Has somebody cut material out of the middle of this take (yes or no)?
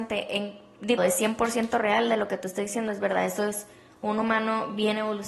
yes